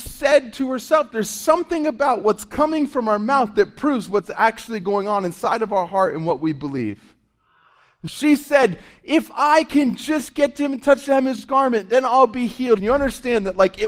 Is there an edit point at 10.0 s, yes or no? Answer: no